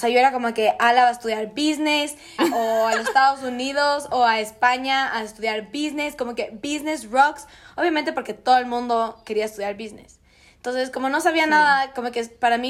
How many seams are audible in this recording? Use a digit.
1